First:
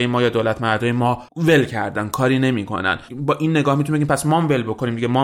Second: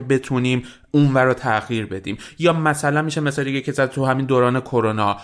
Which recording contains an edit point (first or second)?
first